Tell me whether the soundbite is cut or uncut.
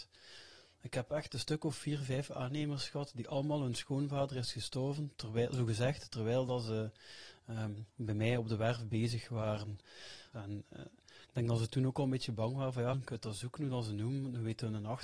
cut